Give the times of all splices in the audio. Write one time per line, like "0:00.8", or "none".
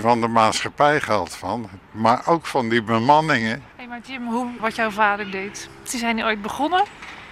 0:04.6
0:05.9